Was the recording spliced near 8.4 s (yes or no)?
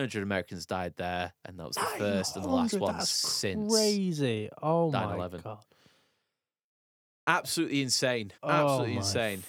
yes